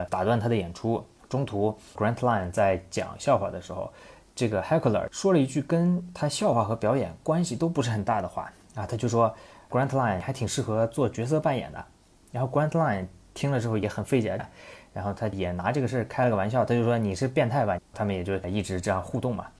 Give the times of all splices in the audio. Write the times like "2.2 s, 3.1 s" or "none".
14.4 s, 17.8 s